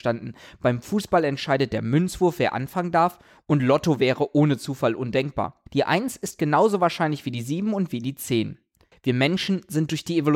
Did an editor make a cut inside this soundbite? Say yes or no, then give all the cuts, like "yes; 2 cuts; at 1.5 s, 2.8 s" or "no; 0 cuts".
yes; 2 cuts; at 5.7 s, 8.9 s